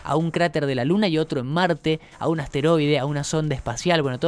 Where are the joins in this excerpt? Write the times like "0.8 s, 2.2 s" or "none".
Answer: none